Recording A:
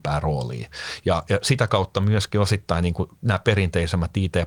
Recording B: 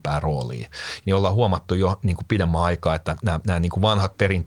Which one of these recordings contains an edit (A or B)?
B